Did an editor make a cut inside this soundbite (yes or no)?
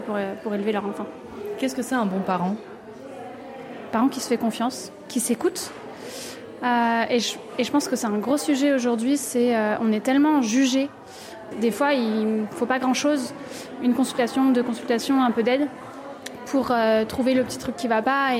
yes